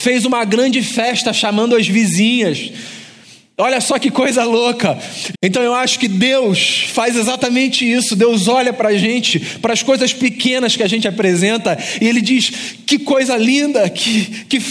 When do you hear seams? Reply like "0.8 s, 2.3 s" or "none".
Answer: 5.3 s